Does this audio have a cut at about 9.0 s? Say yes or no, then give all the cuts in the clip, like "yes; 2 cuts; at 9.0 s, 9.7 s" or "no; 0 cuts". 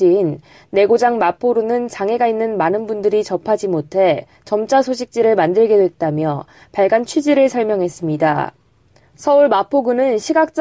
yes; 1 cut; at 9.0 s